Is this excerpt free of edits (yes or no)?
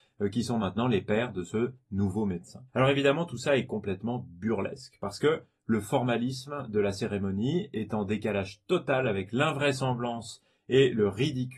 no